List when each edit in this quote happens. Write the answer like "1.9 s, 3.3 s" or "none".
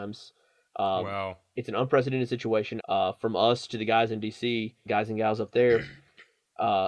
2.8 s, 4.9 s